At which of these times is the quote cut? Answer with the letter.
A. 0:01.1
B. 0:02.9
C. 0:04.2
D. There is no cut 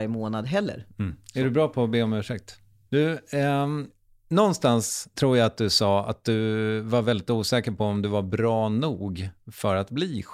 B